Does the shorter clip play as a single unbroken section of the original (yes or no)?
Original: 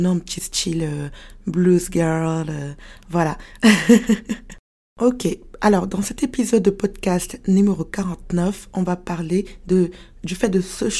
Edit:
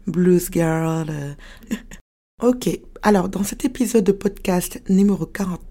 no